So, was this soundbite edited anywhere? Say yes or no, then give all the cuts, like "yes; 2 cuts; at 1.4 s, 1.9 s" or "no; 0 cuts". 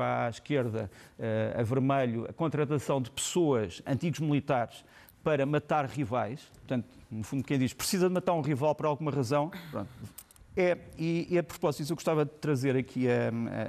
yes; 1 cut; at 10.4 s